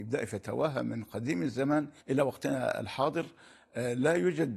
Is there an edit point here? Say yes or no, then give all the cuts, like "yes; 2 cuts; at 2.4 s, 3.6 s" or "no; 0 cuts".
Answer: yes; 1 cut; at 2.0 s